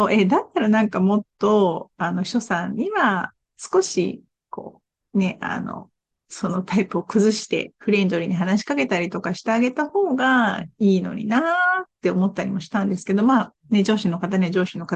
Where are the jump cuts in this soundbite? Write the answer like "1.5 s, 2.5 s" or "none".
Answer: none